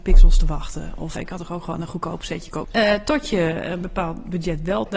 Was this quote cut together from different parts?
yes; 2 cuts; at 1.2 s, 2.6 s

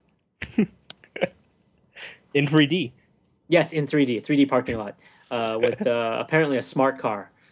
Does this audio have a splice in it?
no; 0 cuts

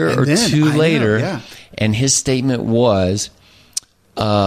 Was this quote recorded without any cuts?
yes; 0 cuts

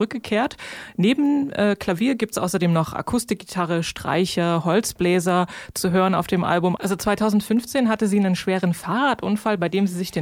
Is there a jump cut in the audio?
yes; 1 cut; at 6.8 s

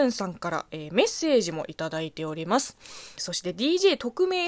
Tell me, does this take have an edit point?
yes; 1 cut; at 3.2 s

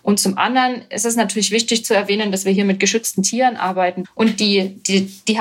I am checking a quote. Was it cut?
yes; 1 cut; at 4.0 s

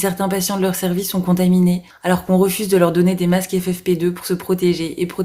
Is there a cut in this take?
yes; 1 cut; at 1.9 s

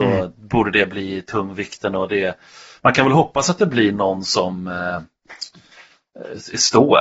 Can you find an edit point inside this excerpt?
no; 0 cuts

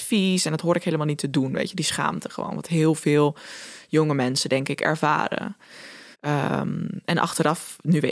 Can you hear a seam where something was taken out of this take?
yes; 1 cut; at 6.1 s

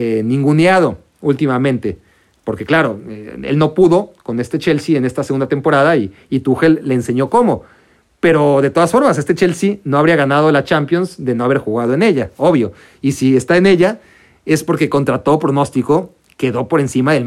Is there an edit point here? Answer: no; 0 cuts

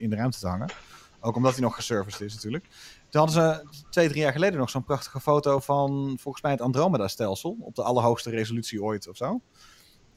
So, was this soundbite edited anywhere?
no; 0 cuts

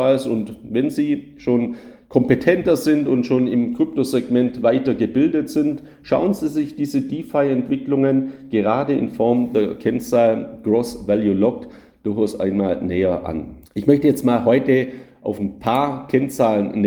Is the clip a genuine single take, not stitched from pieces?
no; 1 cut; at 13.6 s

